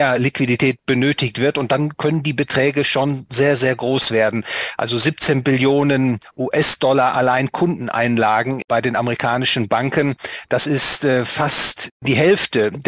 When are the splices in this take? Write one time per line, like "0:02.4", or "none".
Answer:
none